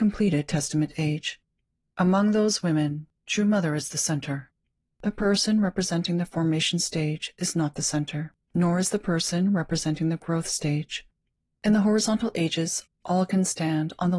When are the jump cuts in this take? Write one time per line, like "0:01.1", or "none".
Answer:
0:01.9
0:11.6